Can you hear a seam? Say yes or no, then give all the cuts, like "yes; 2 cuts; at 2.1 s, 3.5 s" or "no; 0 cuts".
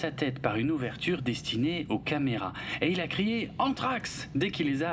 no; 0 cuts